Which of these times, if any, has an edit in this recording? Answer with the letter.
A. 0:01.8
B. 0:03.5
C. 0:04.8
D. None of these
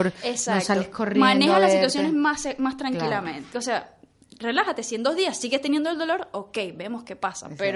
B